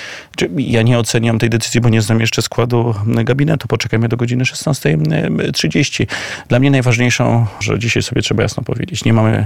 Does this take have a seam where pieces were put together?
yes; 1 cut; at 7.6 s

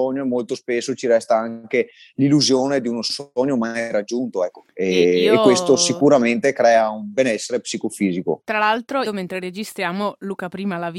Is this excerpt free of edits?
no; 1 cut; at 9.0 s

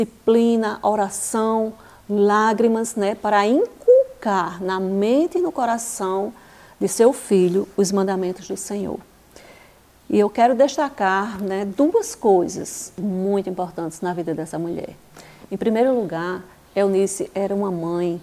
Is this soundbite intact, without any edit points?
yes; 0 cuts

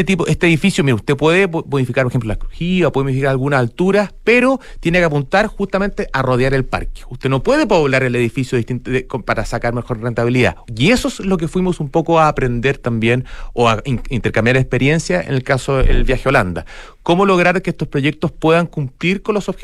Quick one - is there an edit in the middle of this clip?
yes; 1 cut; at 10.7 s

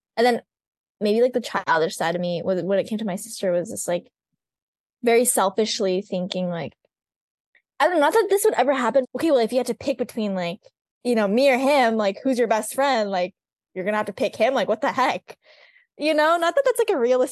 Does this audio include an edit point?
yes; 1 cut; at 9.0 s

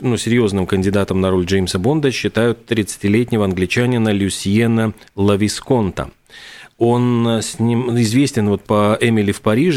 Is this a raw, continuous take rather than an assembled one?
yes; 0 cuts

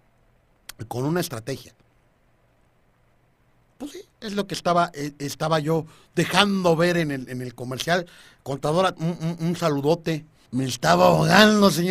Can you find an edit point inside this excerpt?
yes; 2 cuts; at 9.0 s, 10.5 s

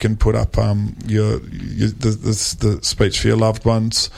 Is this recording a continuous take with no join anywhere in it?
yes; 0 cuts

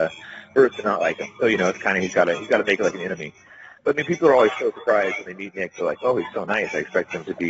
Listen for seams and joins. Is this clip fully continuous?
yes; 0 cuts

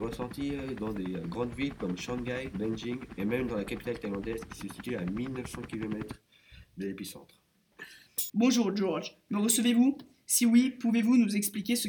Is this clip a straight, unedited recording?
no; 1 cut; at 8.3 s

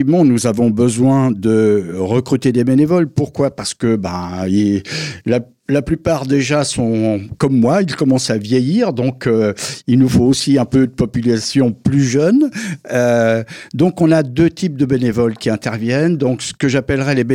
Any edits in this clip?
no; 0 cuts

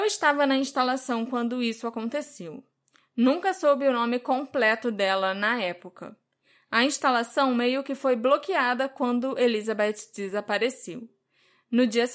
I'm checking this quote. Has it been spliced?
no; 0 cuts

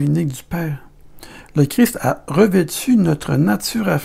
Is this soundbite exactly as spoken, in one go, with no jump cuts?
yes; 0 cuts

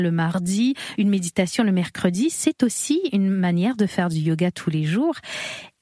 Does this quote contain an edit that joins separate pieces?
no; 0 cuts

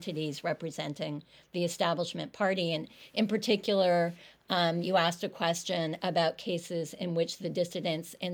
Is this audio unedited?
yes; 0 cuts

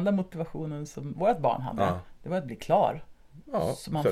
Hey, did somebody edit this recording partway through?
no; 0 cuts

